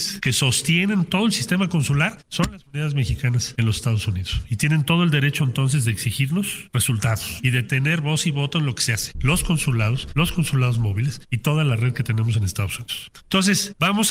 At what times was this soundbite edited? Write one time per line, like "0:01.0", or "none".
0:09.1